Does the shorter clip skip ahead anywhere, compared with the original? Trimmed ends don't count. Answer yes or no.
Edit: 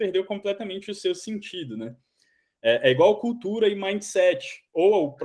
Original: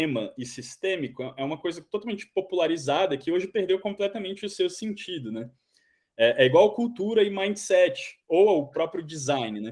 no